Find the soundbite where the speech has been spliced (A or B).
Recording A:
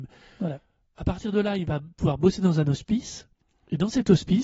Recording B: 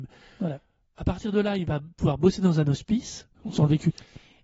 B